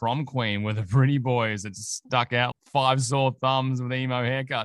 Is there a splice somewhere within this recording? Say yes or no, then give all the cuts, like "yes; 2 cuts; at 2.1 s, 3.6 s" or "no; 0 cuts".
yes; 1 cut; at 2.5 s